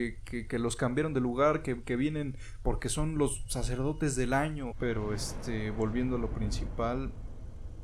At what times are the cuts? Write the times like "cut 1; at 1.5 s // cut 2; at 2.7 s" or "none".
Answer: cut 1; at 4.7 s